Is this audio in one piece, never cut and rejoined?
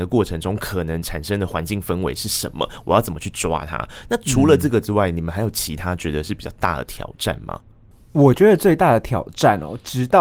yes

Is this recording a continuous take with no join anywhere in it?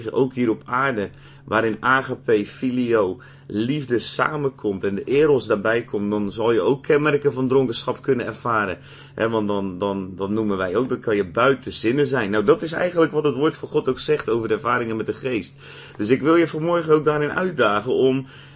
yes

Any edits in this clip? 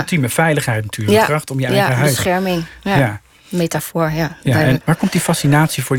yes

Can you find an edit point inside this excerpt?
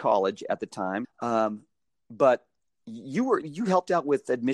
yes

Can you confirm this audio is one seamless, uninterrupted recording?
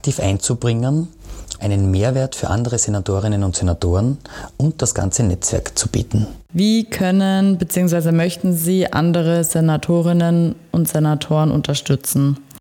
no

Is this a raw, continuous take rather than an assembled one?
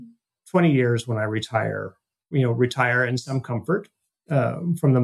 no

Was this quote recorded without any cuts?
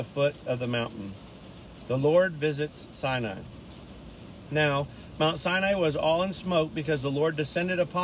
yes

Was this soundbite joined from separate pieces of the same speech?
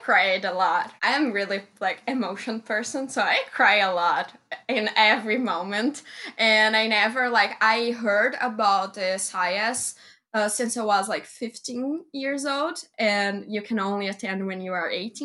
yes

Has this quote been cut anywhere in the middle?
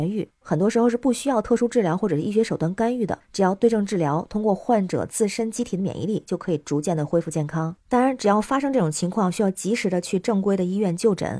no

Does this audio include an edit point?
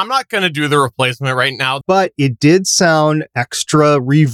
yes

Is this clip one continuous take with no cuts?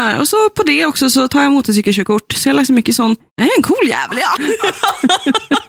no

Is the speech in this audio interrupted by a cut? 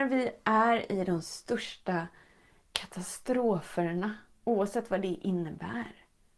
no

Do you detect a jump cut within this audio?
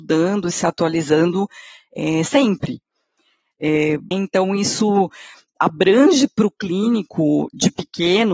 yes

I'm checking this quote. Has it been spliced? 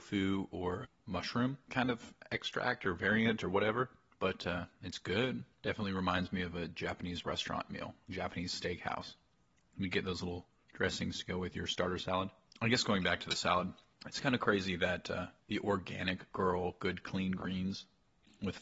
no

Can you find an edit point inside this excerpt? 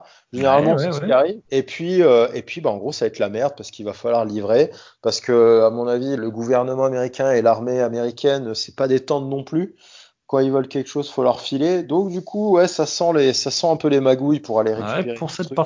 yes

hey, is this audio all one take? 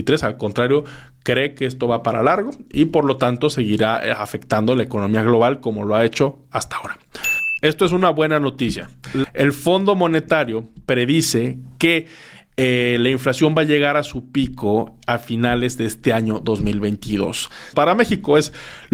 no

